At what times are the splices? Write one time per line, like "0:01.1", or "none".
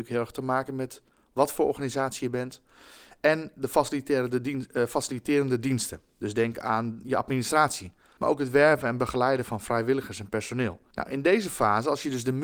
0:08.2
0:10.9